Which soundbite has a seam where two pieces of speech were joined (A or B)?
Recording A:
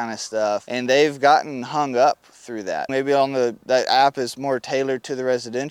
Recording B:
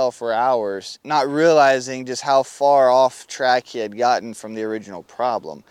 A